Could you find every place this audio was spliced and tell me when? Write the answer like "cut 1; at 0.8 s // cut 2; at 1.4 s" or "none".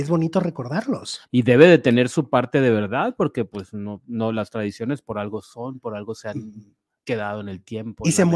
cut 1; at 1.2 s